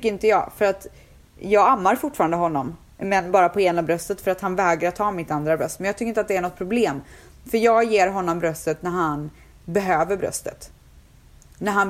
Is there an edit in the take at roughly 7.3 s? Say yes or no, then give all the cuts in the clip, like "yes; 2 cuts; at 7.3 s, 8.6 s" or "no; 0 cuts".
no; 0 cuts